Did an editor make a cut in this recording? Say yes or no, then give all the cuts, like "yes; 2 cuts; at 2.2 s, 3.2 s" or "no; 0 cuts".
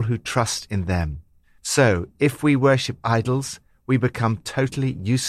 no; 0 cuts